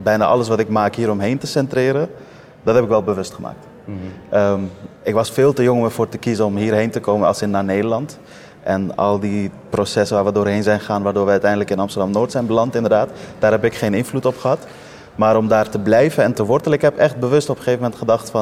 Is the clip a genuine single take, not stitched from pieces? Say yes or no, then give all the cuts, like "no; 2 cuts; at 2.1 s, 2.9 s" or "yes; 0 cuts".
yes; 0 cuts